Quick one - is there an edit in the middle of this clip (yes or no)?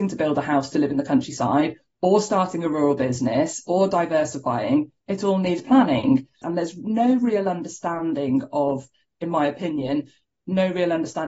yes